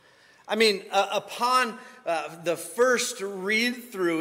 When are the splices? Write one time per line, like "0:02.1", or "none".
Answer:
none